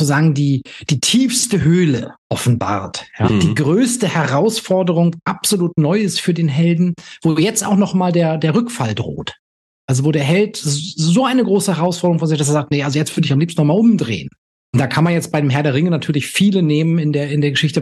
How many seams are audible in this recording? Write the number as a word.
one